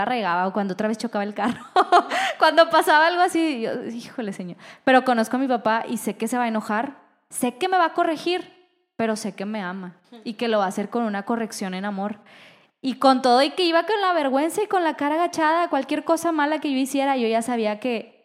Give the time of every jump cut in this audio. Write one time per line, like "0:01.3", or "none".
none